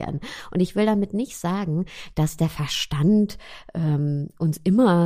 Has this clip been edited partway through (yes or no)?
no